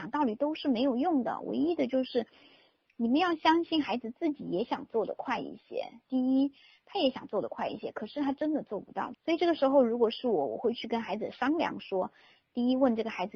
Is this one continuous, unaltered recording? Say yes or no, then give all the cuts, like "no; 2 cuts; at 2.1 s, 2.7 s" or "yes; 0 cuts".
no; 1 cut; at 9.1 s